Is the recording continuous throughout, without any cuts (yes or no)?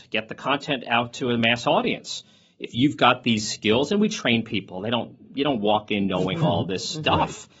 yes